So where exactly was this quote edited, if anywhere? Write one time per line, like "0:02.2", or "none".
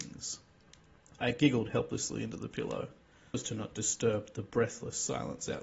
0:03.3